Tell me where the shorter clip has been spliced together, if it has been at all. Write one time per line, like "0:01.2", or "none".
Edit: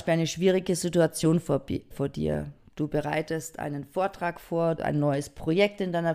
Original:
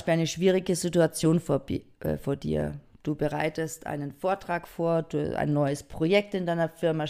0:01.9
0:04.8

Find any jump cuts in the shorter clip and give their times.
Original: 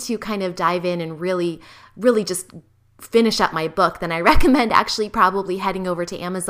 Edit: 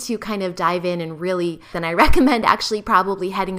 0:01.7

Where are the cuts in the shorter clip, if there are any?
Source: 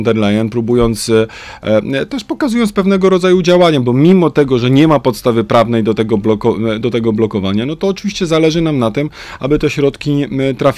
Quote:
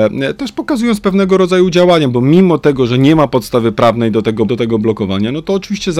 0:04.5

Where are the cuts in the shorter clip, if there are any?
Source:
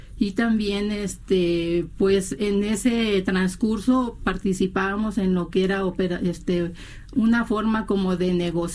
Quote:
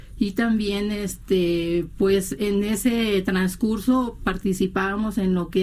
none

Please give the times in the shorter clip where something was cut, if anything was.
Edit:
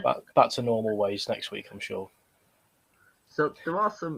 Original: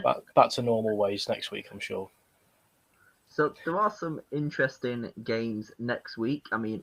none

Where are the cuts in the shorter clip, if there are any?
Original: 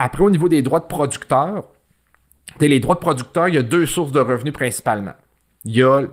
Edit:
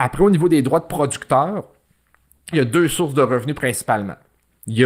0:02.5

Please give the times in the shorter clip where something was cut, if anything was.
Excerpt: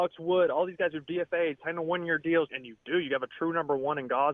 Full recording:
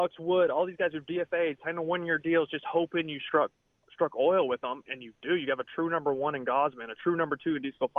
0:02.5

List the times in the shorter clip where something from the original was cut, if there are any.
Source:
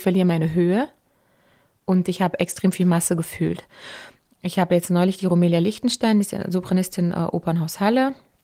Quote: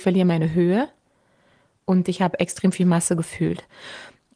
none

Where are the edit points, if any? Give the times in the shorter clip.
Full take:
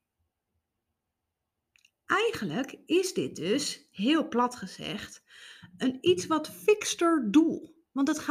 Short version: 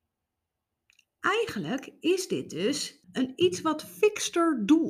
0:03.0

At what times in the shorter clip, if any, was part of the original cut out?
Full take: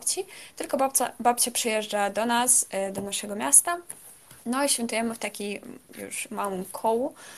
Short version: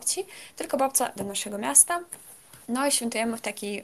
0:01.2

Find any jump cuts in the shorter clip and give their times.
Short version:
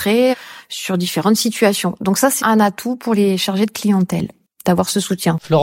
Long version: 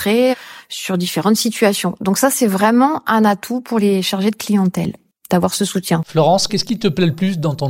0:02.4

